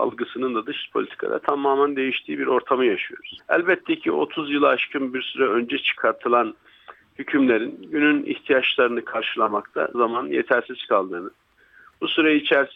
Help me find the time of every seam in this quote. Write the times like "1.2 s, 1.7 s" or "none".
3.4 s, 9.9 s